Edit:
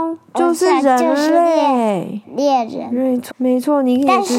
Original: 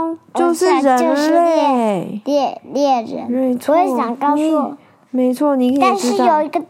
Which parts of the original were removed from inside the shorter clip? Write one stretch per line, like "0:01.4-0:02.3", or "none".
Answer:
0:02.2-0:02.6
0:03.7-0:05.0